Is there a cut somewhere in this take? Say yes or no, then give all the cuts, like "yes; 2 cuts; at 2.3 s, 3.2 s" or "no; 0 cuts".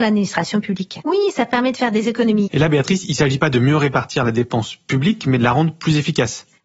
yes; 2 cuts; at 1.0 s, 2.5 s